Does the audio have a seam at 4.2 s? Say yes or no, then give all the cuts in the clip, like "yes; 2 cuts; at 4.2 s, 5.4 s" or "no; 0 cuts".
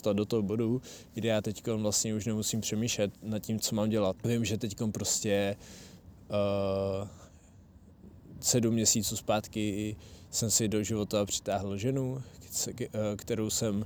yes; 1 cut; at 4.2 s